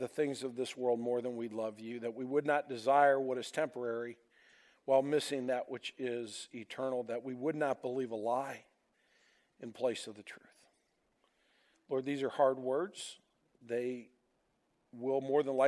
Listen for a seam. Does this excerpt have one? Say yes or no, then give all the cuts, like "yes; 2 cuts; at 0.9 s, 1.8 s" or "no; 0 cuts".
no; 0 cuts